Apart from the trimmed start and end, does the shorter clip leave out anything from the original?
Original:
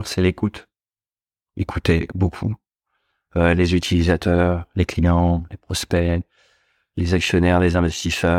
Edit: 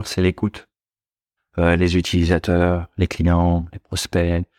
yes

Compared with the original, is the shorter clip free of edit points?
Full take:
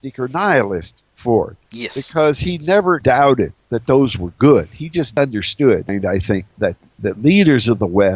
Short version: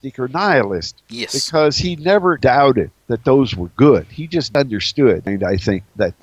no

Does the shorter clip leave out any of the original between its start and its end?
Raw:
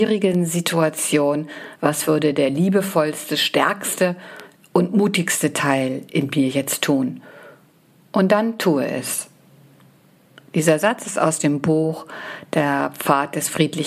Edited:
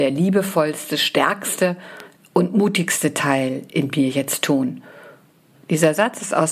yes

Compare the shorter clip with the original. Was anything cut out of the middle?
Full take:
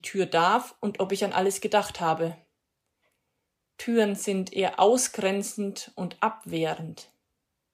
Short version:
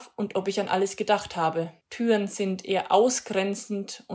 yes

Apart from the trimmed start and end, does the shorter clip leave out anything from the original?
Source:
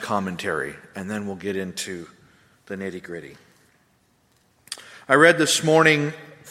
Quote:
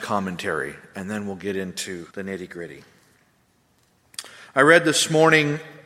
yes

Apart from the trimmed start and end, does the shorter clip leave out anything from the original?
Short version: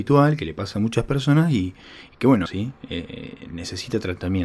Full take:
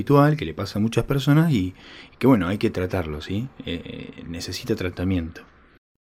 yes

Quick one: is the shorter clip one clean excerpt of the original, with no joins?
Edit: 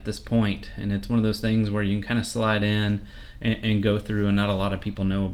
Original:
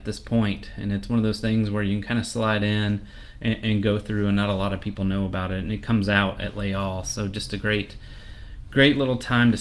yes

